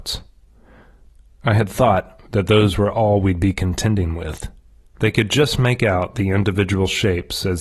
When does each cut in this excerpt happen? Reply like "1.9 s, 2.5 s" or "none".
2.3 s, 4.8 s